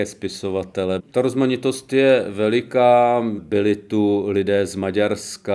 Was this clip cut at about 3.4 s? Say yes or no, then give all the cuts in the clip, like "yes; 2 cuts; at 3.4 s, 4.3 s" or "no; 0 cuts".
yes; 2 cuts; at 1.0 s, 3.4 s